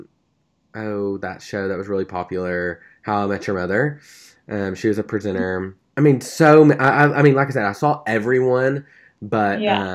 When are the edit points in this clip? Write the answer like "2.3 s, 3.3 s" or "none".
5.9 s